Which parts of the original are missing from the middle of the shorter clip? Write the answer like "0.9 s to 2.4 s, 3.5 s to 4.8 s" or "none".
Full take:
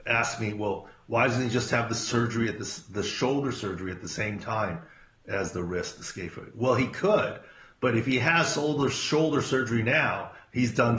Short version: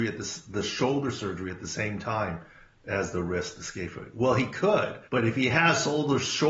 7.5 s to 7.8 s